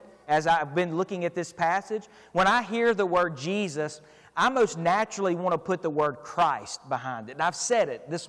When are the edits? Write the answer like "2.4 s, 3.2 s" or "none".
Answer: none